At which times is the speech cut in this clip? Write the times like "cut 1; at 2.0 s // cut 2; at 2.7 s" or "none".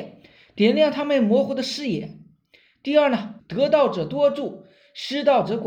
cut 1; at 3.4 s